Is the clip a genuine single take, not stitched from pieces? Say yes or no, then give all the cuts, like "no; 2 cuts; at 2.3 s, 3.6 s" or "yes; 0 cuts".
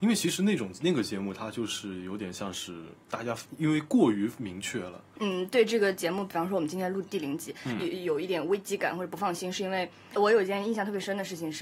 no; 2 cuts; at 5.2 s, 10.2 s